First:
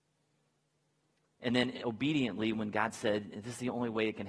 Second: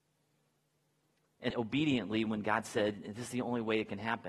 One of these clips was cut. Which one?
second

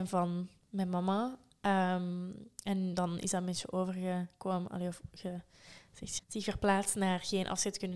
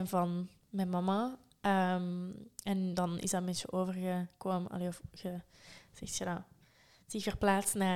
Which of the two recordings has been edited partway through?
first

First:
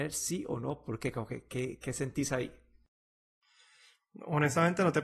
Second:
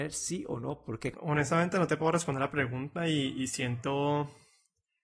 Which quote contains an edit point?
second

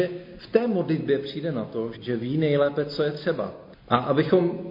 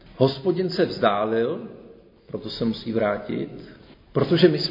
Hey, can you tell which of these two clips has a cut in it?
first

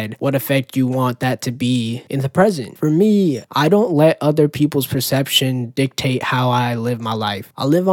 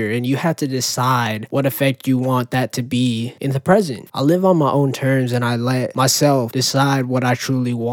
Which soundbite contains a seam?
second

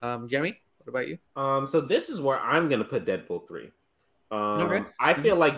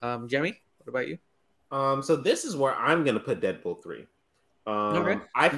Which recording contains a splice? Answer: first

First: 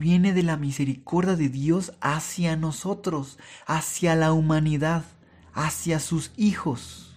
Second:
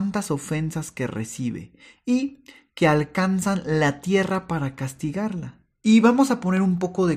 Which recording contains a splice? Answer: second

